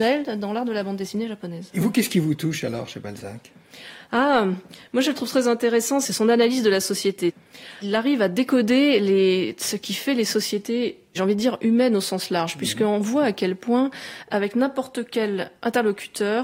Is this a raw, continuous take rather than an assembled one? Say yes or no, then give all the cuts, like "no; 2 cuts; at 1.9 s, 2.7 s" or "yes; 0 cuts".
yes; 0 cuts